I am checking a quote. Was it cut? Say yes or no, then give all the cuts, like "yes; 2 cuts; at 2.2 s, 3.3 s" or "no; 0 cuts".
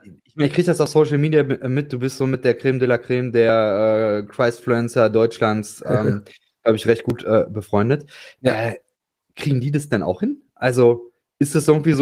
no; 0 cuts